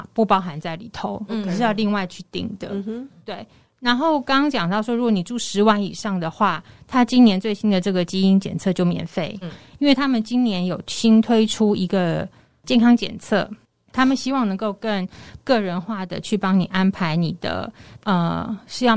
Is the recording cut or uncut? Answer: cut